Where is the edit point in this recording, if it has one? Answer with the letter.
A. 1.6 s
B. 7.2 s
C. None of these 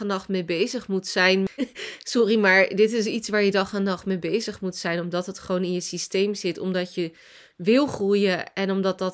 A